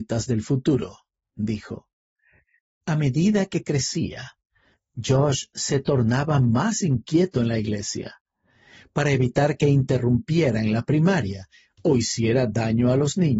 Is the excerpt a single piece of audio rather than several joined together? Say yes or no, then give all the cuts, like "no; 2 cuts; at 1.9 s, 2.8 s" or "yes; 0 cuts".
yes; 0 cuts